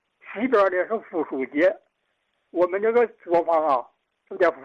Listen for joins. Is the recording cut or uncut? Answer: uncut